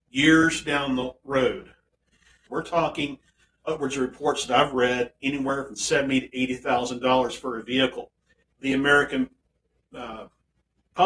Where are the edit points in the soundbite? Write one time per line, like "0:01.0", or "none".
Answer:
0:02.5
0:08.4